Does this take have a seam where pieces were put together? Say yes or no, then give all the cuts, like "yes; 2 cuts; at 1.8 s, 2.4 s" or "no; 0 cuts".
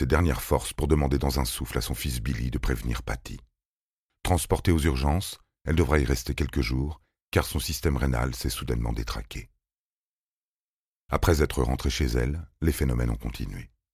no; 0 cuts